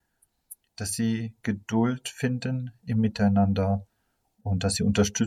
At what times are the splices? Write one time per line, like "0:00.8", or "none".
none